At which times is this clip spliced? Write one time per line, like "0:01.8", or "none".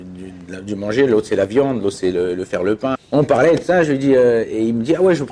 0:03.0